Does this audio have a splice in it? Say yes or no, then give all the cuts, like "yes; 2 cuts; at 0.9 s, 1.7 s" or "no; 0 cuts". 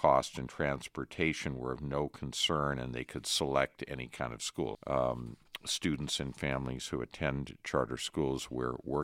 yes; 1 cut; at 4.7 s